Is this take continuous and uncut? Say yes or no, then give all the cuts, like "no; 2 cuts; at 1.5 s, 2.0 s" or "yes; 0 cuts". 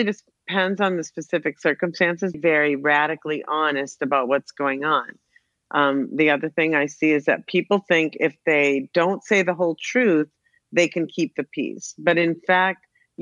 no; 1 cut; at 2.3 s